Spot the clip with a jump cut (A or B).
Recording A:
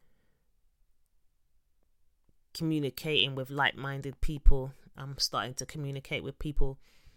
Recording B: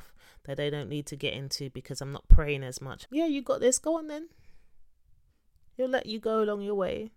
B